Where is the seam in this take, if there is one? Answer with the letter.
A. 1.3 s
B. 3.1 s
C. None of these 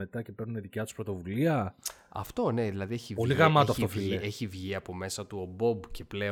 C